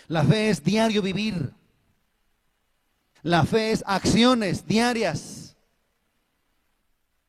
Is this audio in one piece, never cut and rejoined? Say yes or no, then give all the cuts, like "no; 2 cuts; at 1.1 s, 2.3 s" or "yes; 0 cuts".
no; 1 cut; at 3.2 s